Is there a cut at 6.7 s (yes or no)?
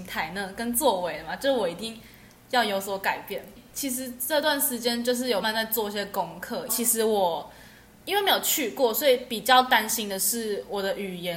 yes